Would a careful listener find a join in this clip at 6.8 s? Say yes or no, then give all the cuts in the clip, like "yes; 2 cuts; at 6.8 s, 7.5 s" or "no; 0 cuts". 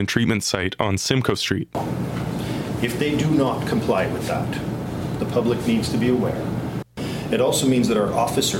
yes; 1 cut; at 6.8 s